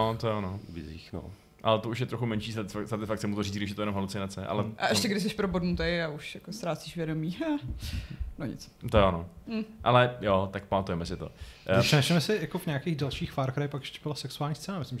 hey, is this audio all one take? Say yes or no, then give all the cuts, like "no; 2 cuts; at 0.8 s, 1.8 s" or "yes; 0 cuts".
yes; 0 cuts